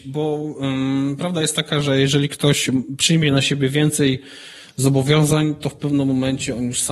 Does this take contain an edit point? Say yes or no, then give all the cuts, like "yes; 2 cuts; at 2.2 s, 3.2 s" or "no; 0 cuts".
no; 0 cuts